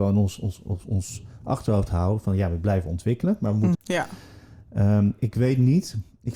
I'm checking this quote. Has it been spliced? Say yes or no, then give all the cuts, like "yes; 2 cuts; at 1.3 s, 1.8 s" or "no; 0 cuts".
yes; 2 cuts; at 3.7 s, 5.2 s